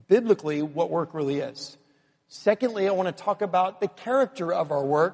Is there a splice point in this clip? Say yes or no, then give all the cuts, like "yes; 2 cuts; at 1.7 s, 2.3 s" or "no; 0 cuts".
no; 0 cuts